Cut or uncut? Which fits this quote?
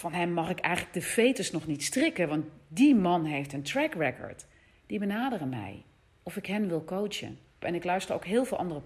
cut